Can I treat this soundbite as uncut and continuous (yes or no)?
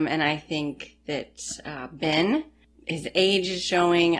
yes